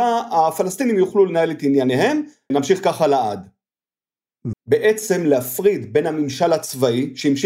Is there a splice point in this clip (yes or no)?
yes